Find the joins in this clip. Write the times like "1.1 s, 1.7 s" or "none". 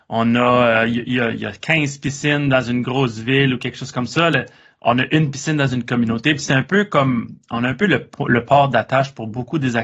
none